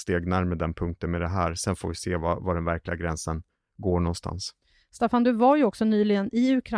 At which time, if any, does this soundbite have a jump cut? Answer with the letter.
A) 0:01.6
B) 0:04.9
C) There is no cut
C